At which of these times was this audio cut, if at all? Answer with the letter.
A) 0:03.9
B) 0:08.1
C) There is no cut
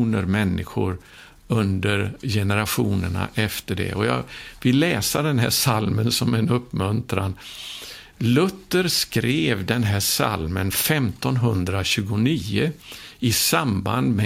B